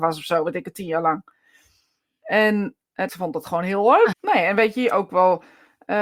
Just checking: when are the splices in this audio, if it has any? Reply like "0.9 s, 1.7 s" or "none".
3.1 s, 4.1 s